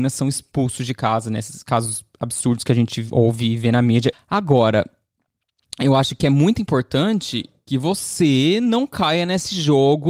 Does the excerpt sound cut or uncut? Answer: cut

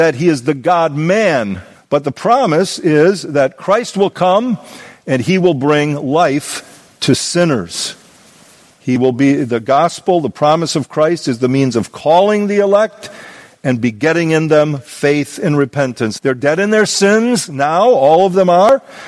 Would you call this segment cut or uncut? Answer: cut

